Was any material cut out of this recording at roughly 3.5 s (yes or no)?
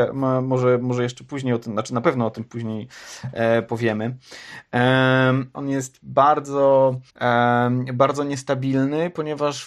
no